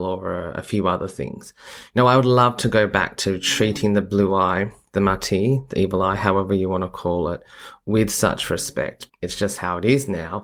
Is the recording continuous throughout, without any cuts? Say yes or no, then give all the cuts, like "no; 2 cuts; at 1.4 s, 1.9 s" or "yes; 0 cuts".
no; 1 cut; at 9.1 s